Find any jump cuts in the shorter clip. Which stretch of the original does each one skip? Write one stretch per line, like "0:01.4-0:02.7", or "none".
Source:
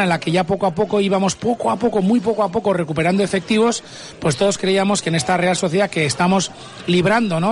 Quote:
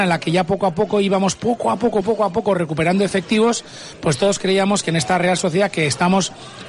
0:02.0-0:02.2